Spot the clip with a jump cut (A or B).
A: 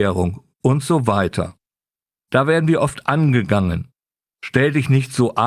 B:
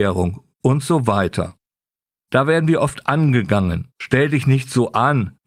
B